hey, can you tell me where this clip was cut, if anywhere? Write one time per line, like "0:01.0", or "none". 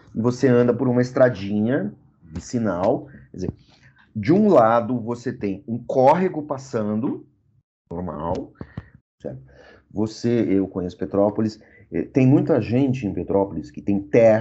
0:09.0